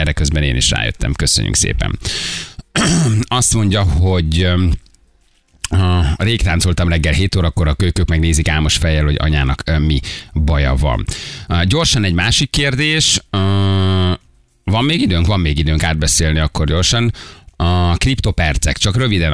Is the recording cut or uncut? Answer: uncut